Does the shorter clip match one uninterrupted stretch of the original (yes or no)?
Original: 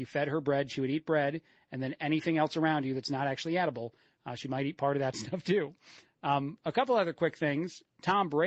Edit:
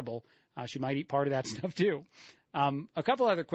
yes